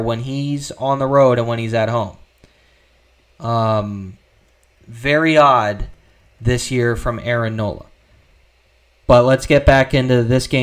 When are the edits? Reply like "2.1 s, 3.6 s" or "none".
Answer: none